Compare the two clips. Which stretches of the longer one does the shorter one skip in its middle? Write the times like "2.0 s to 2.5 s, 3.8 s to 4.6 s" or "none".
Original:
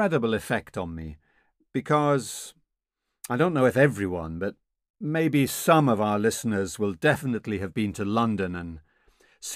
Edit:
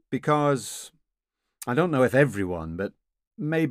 none